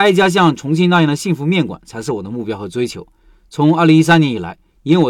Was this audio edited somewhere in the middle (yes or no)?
no